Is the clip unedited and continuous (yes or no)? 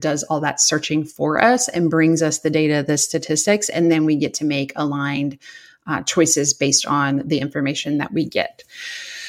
yes